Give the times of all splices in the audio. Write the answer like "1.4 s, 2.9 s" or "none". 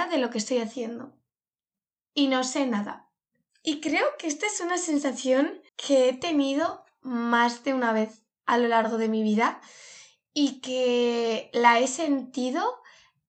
3.5 s, 5.7 s